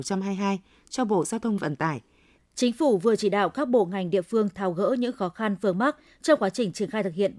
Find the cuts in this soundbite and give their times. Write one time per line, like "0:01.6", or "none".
0:02.4